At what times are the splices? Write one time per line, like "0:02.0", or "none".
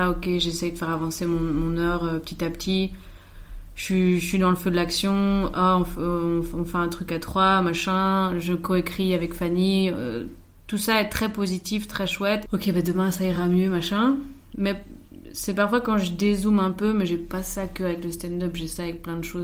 0:12.5